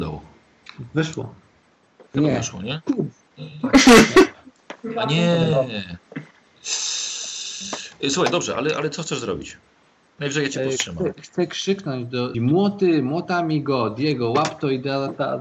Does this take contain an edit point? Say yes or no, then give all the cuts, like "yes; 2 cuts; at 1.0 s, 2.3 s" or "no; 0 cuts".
yes; 1 cut; at 12.3 s